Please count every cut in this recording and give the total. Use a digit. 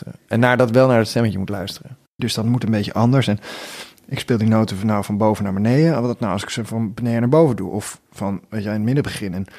1